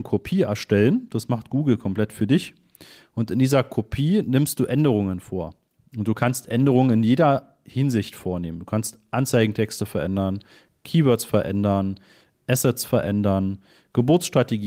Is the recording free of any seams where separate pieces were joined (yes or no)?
yes